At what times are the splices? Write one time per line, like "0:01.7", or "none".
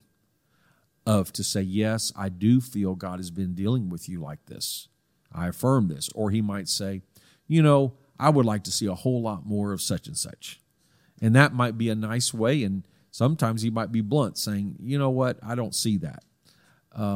none